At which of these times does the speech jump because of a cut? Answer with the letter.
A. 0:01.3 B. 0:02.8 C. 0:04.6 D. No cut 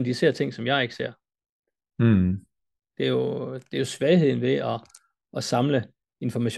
B